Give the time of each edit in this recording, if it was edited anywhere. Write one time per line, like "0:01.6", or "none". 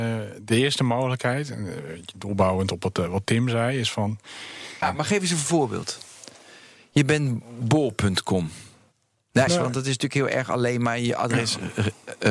0:04.8
0:09.5